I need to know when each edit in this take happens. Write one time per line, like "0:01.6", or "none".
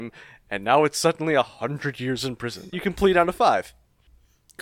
0:02.7

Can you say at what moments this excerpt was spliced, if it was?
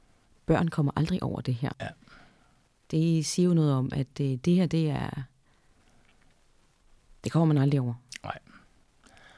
0:01.7

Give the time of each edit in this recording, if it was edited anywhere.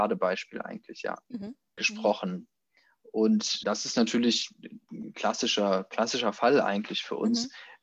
0:01.8
0:03.6

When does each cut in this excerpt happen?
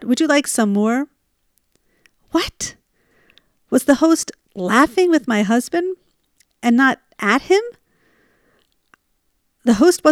none

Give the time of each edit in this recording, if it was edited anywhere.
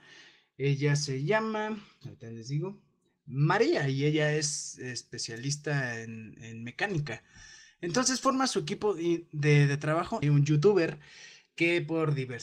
0:10.2

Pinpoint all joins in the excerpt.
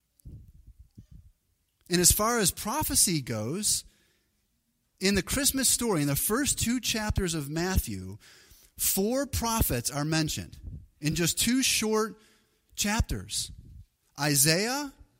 none

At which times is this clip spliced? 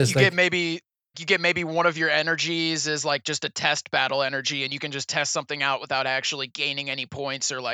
0:01.1

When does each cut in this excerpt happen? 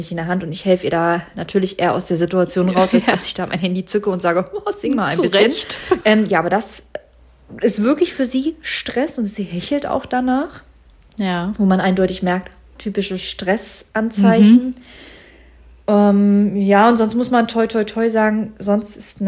0:06.0
0:12.8

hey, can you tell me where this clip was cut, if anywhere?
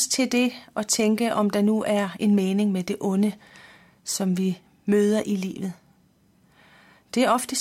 none

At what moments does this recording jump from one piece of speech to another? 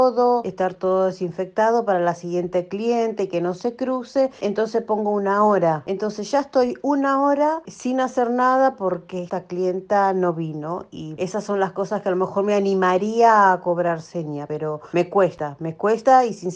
0:07.6
0:11.2

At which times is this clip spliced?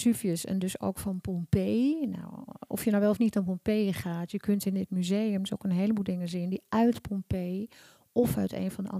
none

